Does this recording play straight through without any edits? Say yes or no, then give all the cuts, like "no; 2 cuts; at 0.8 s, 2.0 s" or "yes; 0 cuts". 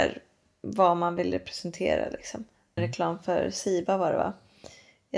no; 1 cut; at 2.8 s